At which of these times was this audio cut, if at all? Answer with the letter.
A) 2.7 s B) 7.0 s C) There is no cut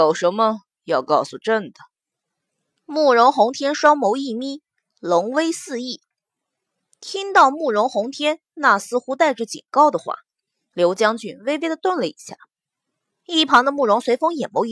A